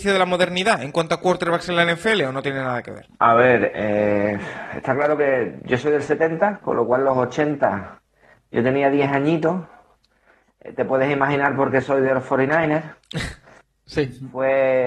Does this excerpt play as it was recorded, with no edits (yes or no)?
yes